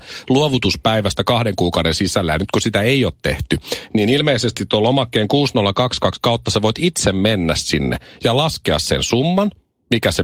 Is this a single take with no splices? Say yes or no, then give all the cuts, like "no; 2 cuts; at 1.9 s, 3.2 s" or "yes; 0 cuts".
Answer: yes; 0 cuts